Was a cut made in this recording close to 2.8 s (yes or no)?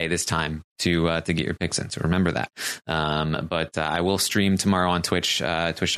no